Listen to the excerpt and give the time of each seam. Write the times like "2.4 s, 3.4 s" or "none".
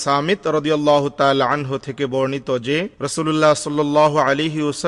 2.9 s